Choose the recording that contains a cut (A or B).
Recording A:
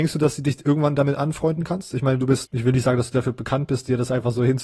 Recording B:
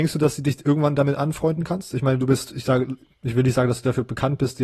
A